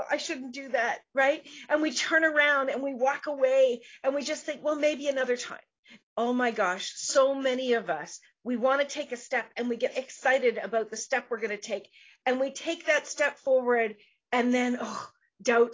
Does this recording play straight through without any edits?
no; 2 cuts; at 6.0 s, 9.9 s

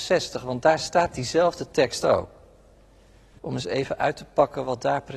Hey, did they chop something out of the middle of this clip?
yes; 1 cut; at 3.4 s

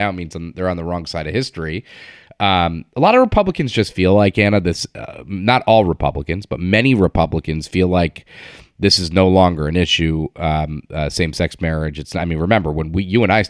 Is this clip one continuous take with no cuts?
yes; 0 cuts

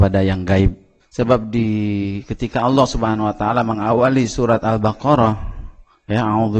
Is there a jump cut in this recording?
yes; 1 cut; at 1.0 s

